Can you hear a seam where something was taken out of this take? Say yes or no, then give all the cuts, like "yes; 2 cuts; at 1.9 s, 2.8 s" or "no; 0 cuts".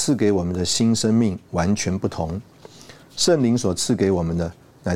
no; 0 cuts